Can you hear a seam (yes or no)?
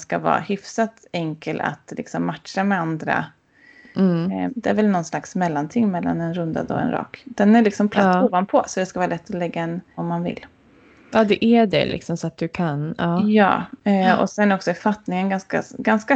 yes